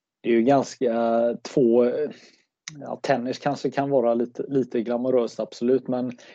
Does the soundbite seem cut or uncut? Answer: uncut